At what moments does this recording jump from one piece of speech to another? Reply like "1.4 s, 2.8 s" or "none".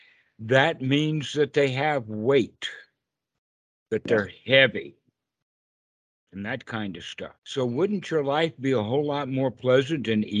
6.3 s, 7.4 s